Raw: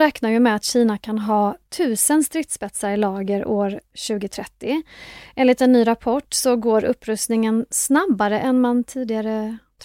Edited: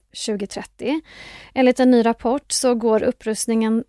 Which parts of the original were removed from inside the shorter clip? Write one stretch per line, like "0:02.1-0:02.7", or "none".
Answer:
none